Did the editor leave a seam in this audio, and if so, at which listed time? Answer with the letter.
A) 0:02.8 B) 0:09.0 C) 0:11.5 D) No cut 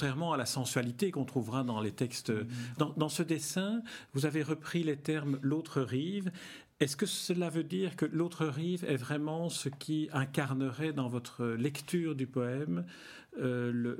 A